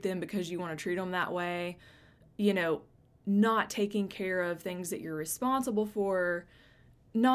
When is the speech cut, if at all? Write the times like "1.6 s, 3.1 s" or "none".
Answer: none